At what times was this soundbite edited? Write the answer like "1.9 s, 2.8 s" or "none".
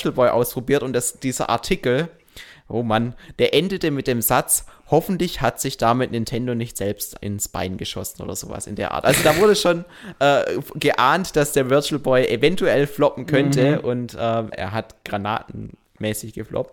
14.5 s